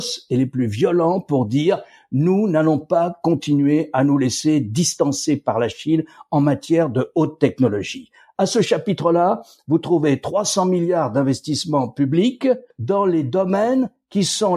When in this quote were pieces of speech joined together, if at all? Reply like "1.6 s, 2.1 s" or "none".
12.7 s